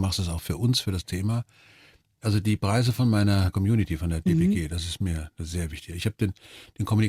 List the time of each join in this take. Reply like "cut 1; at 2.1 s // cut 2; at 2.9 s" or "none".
none